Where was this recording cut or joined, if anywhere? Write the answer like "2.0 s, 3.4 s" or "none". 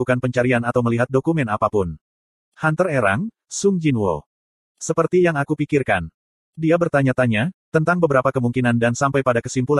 none

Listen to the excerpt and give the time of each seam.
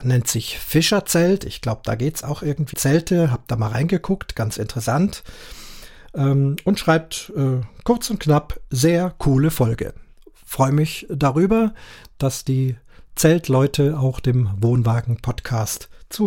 2.7 s

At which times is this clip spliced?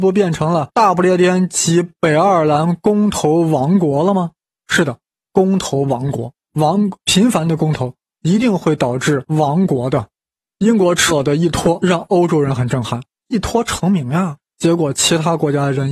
11.1 s

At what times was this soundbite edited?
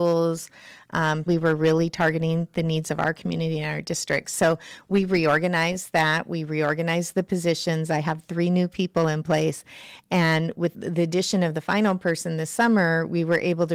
1.3 s, 10.7 s

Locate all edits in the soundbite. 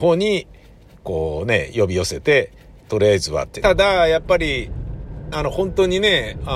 3.6 s, 5.3 s

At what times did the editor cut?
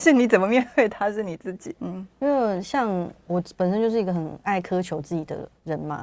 1.8 s

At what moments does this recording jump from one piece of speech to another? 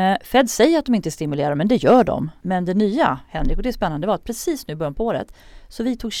2.4 s

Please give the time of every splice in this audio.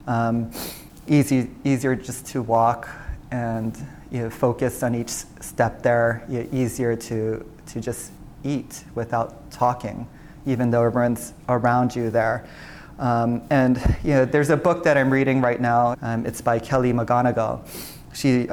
15.9 s

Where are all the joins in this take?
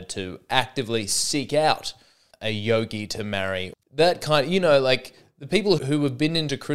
2.3 s, 3.8 s, 5.8 s

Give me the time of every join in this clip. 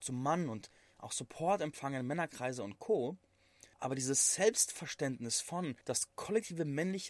3.7 s, 5.8 s

